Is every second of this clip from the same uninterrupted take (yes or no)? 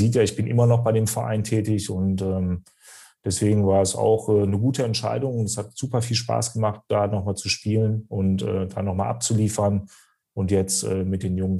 yes